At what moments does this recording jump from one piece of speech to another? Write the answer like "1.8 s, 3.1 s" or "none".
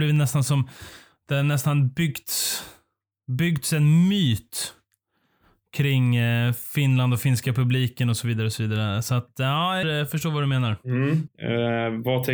9.8 s, 11.3 s